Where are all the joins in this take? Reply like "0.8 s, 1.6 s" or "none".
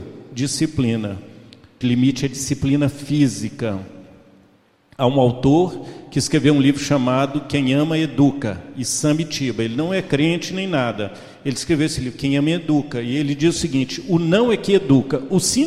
1.8 s